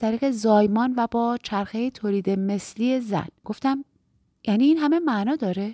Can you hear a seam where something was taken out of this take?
yes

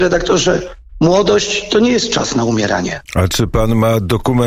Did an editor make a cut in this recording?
yes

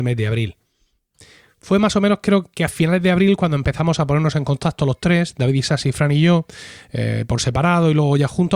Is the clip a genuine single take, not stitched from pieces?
yes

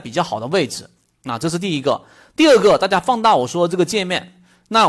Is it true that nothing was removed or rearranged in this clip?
yes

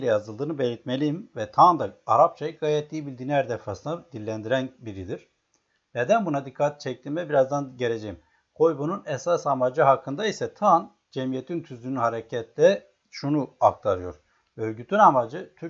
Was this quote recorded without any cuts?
yes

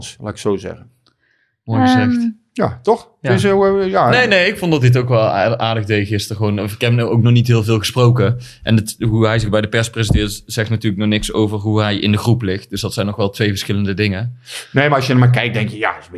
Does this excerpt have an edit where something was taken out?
no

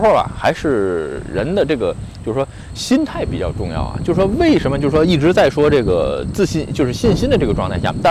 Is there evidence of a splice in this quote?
no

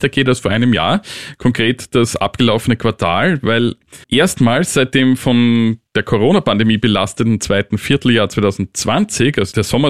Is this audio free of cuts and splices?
no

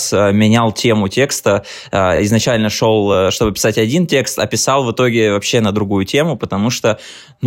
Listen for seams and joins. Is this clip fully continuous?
yes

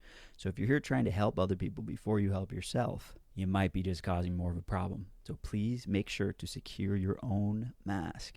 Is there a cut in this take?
no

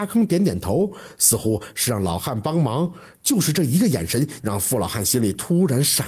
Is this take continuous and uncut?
no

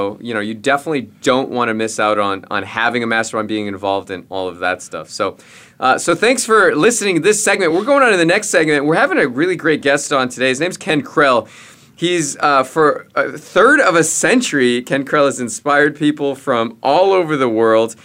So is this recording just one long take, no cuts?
yes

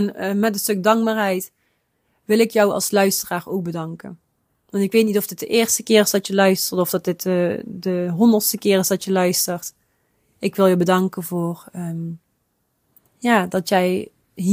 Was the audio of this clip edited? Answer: no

